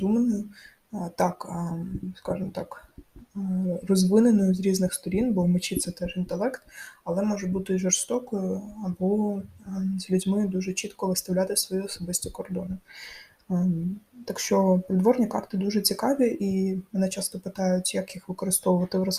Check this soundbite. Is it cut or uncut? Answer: uncut